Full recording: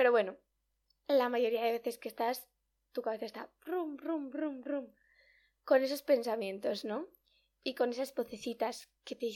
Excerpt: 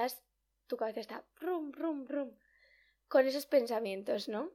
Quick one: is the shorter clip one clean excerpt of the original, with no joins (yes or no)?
no